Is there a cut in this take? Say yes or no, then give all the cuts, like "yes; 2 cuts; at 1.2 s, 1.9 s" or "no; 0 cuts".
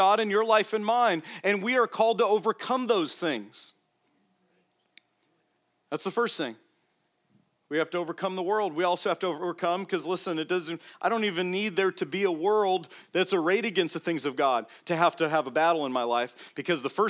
no; 0 cuts